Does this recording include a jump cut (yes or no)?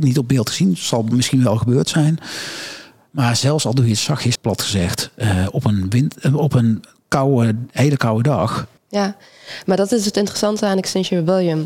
yes